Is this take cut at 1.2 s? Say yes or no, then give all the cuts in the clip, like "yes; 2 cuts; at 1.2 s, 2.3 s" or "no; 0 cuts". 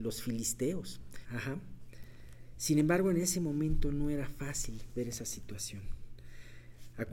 yes; 1 cut; at 1.2 s